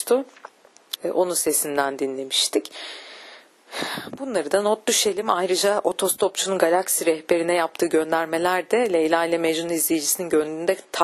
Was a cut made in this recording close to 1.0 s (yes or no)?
yes